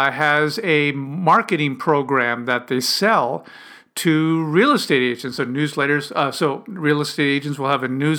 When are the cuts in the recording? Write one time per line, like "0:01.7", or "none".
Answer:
0:05.4